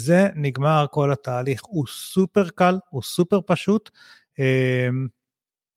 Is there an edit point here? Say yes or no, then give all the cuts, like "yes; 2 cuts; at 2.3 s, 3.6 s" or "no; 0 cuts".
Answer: no; 0 cuts